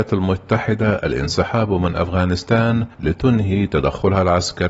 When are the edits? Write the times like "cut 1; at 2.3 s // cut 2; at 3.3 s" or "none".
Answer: cut 1; at 2.9 s